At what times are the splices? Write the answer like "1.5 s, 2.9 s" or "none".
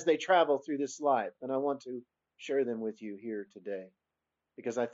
none